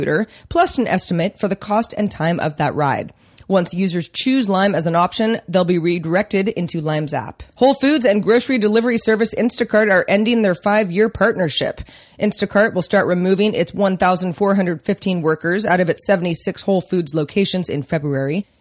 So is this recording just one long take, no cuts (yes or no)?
no